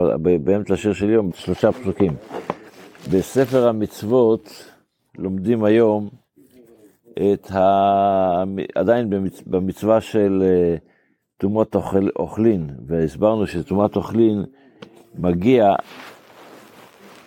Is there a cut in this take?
yes; 2 cuts; at 1.3 s, 3.0 s

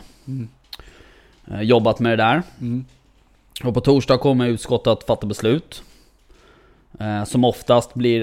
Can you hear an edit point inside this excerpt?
no; 0 cuts

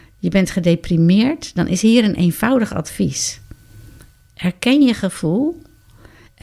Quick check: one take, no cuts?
yes; 0 cuts

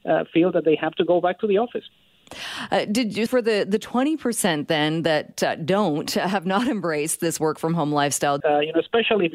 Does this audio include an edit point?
yes; 2 cuts; at 3.3 s, 8.4 s

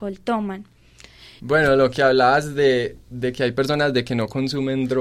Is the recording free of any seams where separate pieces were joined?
no; 1 cut; at 1.4 s

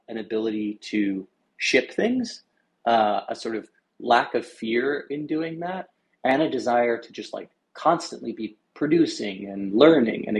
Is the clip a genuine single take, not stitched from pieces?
yes; 0 cuts

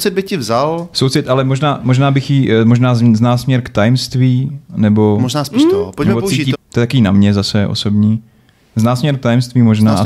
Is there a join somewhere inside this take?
yes; 1 cut; at 6.5 s

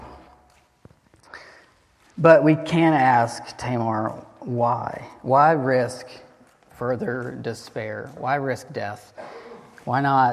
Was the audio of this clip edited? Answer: no; 0 cuts

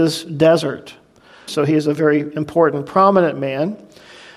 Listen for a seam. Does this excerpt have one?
yes; 1 cut; at 1.5 s

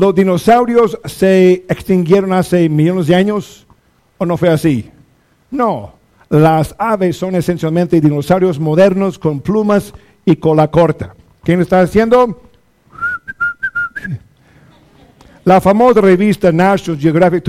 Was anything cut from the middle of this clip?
no; 0 cuts

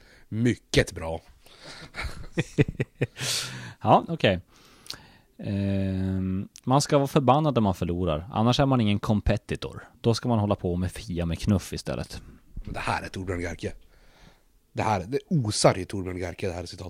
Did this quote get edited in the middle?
no; 0 cuts

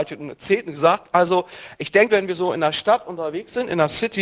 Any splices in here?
yes; 1 cut; at 2.1 s

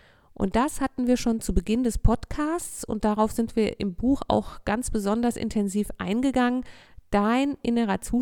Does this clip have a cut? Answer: no; 0 cuts

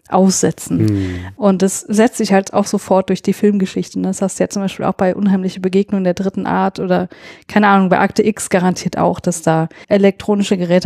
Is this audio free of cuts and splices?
yes; 0 cuts

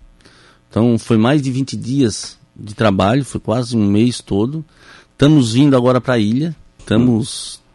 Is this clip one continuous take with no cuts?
no; 1 cut; at 6.8 s

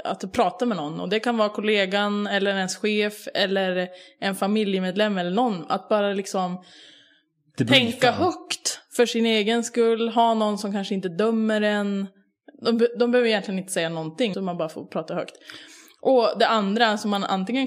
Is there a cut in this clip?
yes; 1 cut; at 14.3 s

